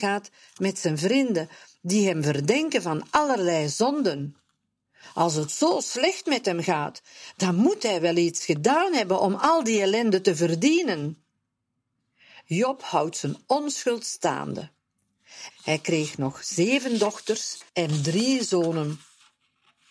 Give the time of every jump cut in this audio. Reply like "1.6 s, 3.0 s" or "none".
15.5 s, 17.7 s

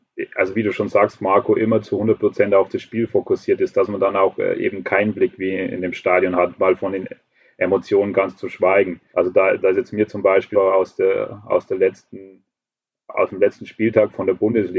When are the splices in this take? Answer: 9.1 s, 10.5 s

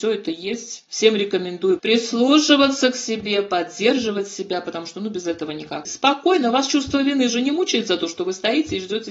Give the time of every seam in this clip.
5.9 s

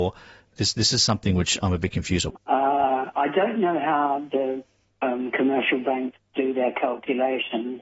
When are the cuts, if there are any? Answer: 2.3 s

